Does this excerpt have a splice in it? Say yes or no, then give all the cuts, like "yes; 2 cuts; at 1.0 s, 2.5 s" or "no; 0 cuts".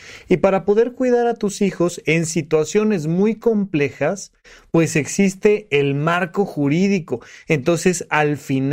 no; 0 cuts